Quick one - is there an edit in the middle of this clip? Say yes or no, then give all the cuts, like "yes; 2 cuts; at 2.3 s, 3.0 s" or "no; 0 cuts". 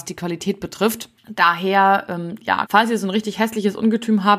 yes; 2 cuts; at 1.2 s, 2.7 s